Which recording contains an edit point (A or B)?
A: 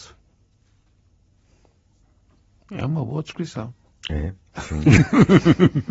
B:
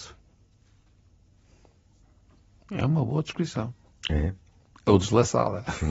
A